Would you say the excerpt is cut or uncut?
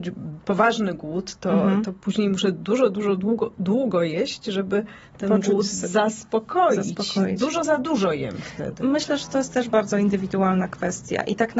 uncut